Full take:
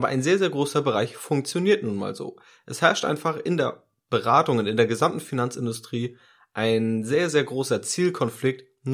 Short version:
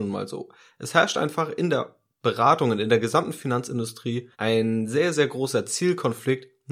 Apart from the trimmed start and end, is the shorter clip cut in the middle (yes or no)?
yes